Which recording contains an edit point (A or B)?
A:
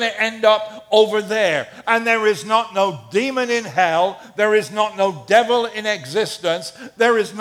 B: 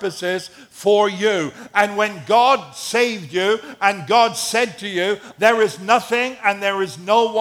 B